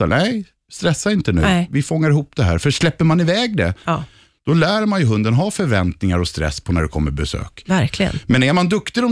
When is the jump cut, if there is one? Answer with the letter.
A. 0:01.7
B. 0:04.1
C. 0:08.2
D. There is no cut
D